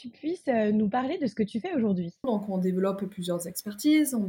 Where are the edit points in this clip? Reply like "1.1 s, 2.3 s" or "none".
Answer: 2.2 s

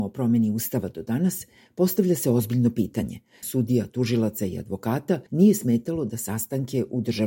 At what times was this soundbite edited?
3.4 s, 5.3 s

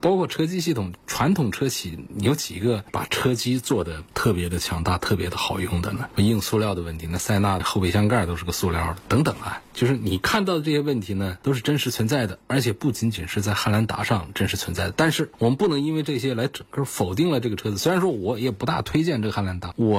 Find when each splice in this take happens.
none

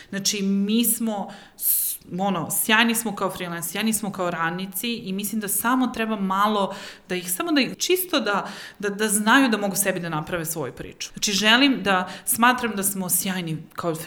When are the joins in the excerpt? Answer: 7.7 s, 11.1 s

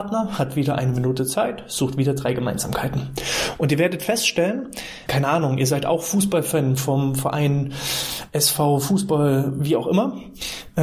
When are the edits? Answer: 5.1 s

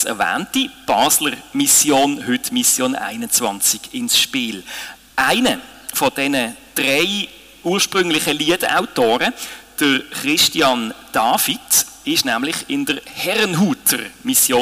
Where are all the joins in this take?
none

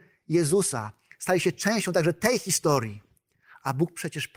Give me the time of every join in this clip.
none

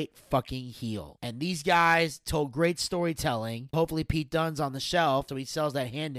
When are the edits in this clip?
3.7 s, 5.3 s

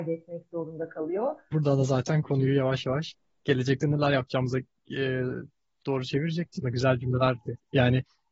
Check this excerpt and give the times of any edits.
1.5 s, 6.6 s

